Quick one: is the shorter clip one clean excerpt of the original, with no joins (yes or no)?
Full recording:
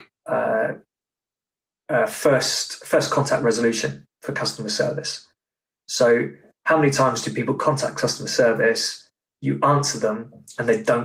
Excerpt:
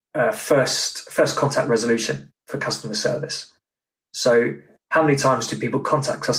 yes